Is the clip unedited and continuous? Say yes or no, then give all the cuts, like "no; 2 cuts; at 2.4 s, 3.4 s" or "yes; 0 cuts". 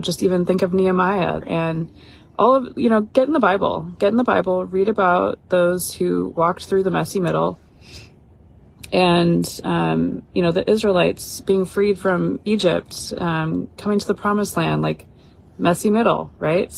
no; 1 cut; at 1.4 s